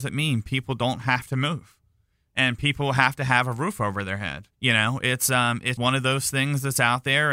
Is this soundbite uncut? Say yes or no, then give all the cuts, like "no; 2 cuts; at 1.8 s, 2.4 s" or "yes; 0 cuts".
no; 2 cuts; at 4.5 s, 5.8 s